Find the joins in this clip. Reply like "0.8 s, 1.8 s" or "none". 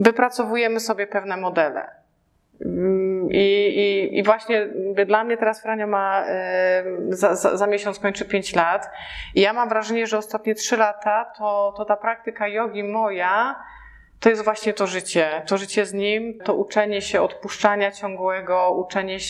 16.4 s